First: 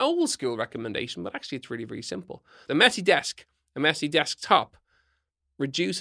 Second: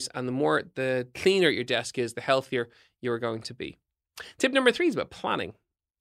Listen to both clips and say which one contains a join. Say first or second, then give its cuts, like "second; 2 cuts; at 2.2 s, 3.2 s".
first; 1 cut; at 2.7 s